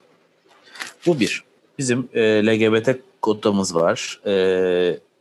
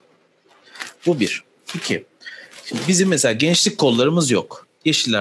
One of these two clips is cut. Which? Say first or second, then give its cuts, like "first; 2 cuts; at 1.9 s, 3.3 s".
first; 1 cut; at 1.6 s